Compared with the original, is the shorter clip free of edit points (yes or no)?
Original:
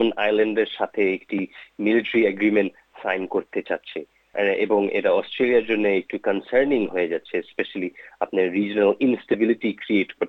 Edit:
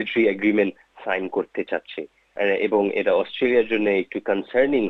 yes